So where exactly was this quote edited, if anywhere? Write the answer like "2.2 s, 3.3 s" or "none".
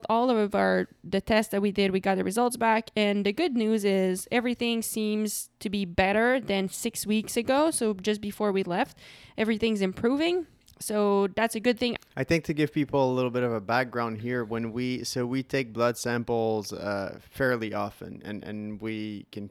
12.0 s